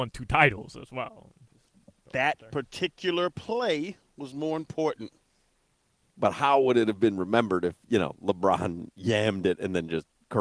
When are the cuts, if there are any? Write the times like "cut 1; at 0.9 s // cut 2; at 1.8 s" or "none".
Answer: cut 1; at 6.0 s